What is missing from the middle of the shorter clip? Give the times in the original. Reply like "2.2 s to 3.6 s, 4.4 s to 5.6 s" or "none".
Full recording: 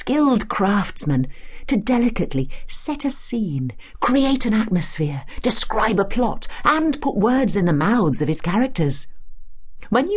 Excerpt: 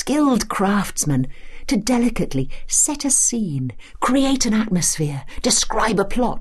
none